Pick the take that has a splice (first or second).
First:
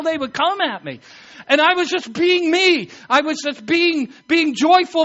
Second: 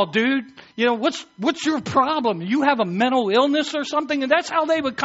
first